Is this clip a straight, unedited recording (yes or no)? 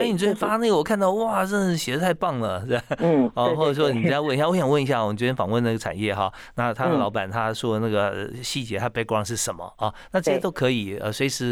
yes